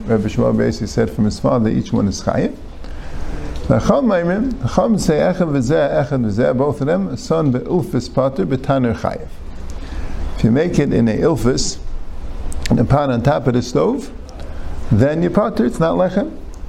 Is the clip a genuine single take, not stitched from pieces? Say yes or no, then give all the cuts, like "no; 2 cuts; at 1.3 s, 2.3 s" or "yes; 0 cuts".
yes; 0 cuts